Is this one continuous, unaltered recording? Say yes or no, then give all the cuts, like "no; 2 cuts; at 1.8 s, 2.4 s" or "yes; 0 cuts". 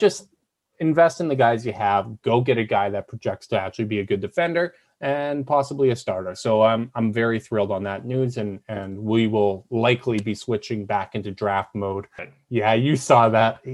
no; 1 cut; at 12.2 s